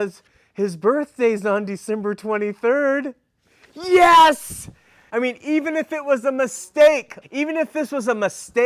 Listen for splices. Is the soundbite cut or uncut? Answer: cut